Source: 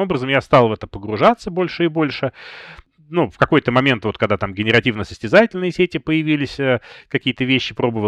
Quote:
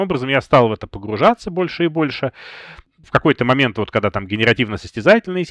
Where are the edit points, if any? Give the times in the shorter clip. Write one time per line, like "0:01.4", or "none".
0:03.0